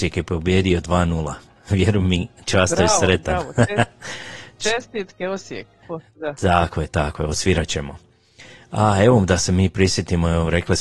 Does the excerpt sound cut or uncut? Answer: cut